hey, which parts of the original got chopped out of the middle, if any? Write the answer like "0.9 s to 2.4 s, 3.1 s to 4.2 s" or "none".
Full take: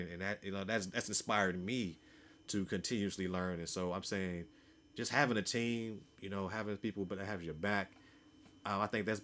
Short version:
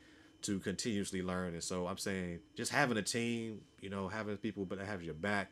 4.5 s to 4.9 s